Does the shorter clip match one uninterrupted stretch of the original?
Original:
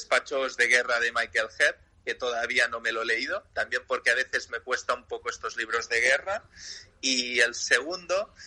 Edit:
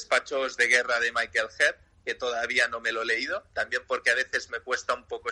yes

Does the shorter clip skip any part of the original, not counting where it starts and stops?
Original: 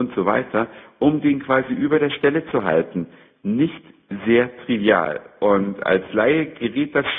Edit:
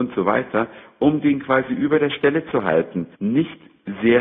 yes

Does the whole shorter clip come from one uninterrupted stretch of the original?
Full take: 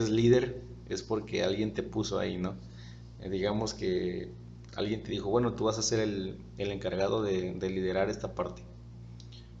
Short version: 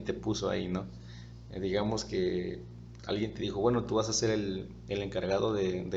yes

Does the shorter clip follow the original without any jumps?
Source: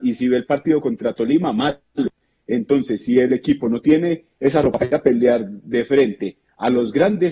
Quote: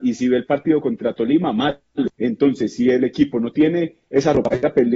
no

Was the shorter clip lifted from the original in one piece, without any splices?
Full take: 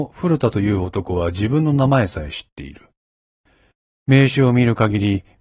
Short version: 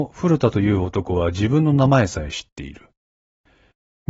yes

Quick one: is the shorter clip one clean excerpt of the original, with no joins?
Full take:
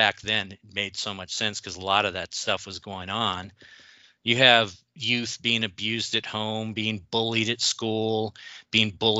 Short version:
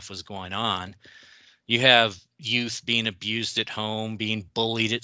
yes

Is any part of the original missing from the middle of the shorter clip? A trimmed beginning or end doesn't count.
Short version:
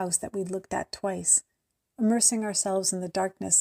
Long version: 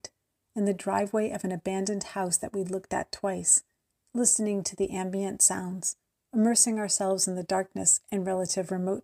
yes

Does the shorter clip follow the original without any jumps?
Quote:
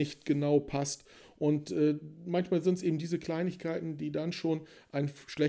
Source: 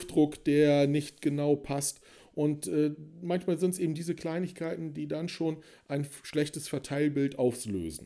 yes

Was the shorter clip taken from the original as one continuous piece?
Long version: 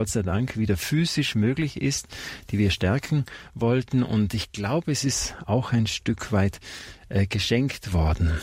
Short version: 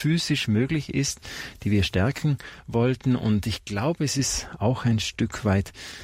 yes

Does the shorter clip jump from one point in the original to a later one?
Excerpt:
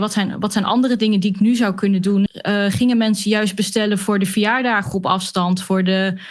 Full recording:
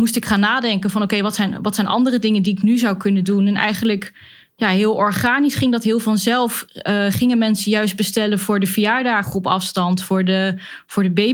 yes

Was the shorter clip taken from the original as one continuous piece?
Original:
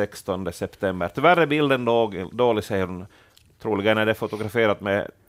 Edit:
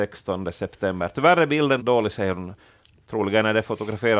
no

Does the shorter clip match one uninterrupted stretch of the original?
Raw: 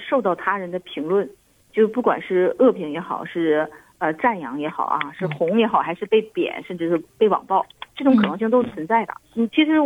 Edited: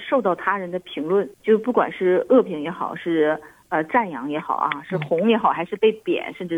no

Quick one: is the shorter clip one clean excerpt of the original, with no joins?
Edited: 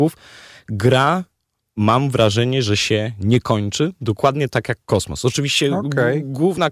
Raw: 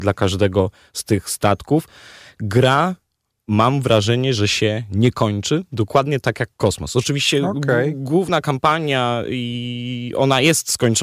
yes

